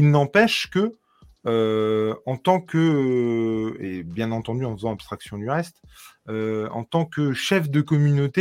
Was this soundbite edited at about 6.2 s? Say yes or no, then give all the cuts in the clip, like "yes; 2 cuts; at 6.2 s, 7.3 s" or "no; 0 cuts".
no; 0 cuts